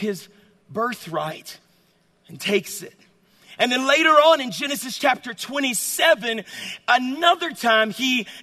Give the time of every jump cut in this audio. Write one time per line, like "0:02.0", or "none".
none